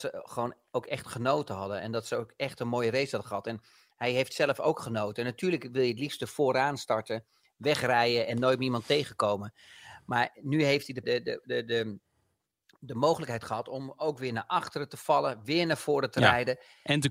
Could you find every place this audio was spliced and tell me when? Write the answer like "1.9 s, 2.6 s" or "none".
11.0 s

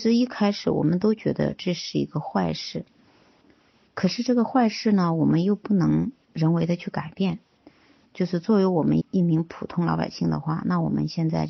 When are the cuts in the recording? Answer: 9.0 s

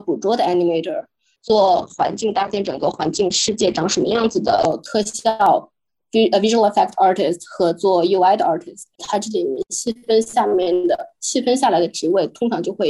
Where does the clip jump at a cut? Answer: 1.4 s, 9.0 s

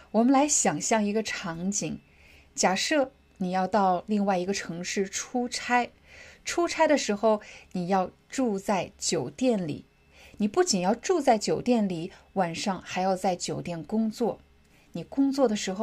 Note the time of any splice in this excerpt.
none

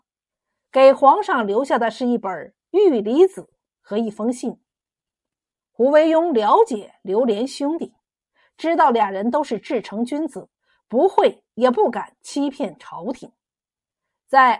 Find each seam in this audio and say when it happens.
none

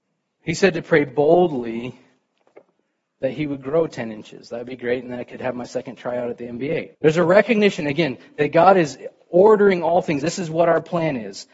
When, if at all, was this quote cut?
6.9 s, 10.2 s

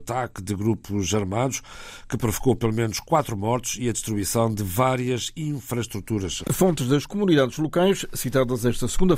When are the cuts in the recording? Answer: 6.4 s

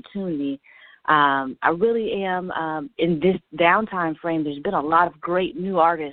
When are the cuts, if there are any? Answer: 3.0 s

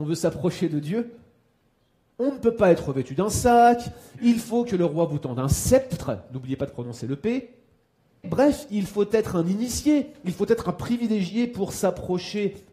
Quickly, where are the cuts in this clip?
8.2 s

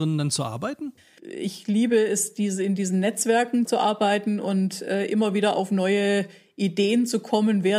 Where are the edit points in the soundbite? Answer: 1.2 s, 3.7 s

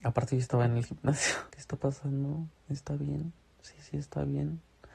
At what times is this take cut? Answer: 1.5 s

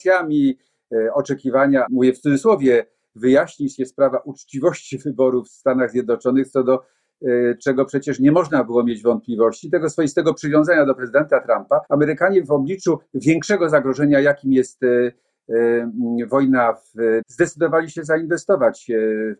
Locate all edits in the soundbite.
1.9 s, 11.9 s, 17.2 s

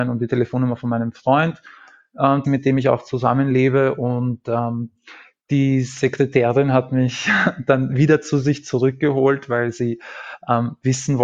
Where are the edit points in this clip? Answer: 2.4 s

